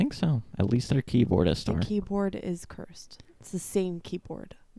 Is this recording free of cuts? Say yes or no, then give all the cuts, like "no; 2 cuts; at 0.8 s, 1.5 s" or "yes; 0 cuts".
yes; 0 cuts